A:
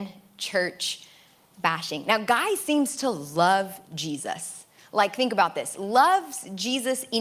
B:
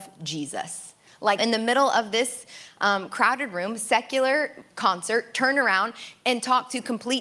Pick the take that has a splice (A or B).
B